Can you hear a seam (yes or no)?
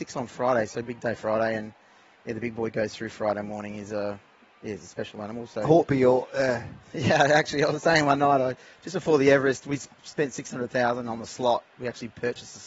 no